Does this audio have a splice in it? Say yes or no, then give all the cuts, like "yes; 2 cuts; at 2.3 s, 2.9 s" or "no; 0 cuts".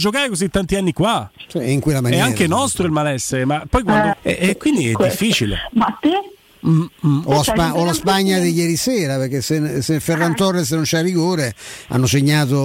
yes; 2 cuts; at 4.1 s, 5.7 s